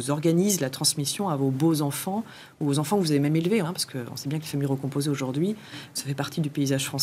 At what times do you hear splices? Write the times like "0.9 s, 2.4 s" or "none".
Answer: 3.6 s, 6.0 s